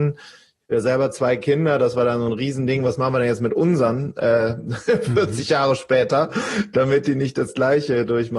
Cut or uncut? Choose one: uncut